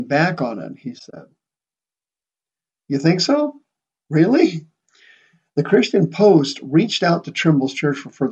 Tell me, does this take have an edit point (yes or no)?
no